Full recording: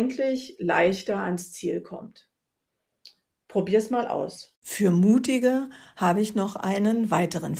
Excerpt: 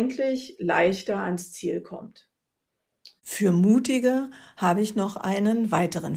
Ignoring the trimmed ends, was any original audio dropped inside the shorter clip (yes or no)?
yes